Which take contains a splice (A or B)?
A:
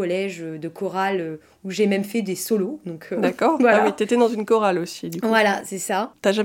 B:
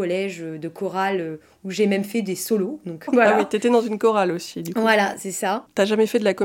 B